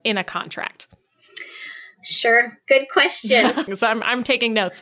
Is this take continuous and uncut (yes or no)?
no